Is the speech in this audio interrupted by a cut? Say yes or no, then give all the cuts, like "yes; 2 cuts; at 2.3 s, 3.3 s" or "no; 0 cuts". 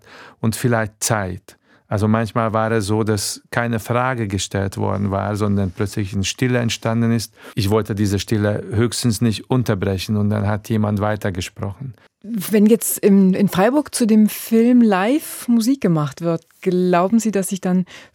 no; 0 cuts